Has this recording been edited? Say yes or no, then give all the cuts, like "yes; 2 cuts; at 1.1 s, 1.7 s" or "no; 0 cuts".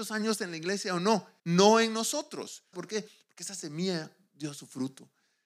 yes; 2 cuts; at 1.4 s, 2.7 s